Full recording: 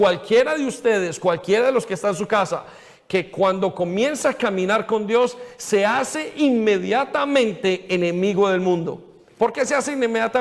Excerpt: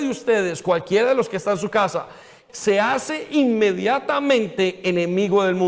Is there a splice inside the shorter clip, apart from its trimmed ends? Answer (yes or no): yes